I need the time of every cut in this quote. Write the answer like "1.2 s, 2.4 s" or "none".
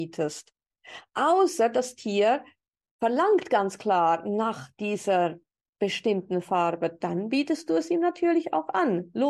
none